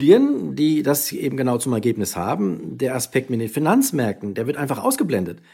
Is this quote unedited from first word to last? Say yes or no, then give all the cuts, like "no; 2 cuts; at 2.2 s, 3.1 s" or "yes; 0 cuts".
yes; 0 cuts